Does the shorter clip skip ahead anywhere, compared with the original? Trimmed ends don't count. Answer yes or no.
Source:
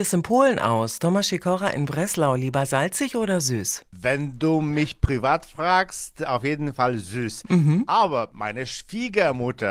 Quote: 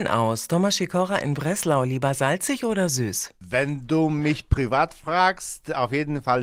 no